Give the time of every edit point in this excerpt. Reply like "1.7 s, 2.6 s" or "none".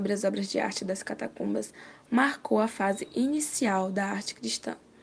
none